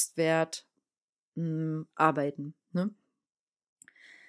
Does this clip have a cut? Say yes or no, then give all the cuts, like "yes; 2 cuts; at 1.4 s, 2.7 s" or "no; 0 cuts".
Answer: no; 0 cuts